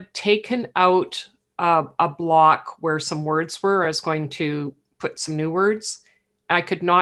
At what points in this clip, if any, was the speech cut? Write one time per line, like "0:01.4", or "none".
none